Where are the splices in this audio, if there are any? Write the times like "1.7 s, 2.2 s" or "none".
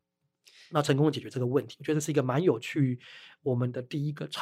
none